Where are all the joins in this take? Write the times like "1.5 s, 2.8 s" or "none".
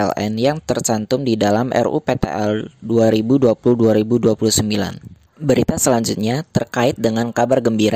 5.3 s